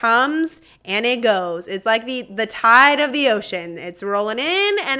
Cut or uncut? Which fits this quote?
uncut